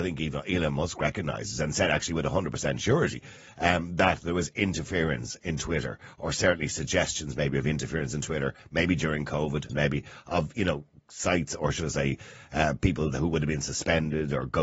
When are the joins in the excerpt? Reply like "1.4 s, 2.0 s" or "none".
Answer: 9.7 s